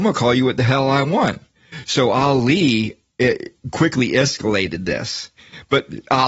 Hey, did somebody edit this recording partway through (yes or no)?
yes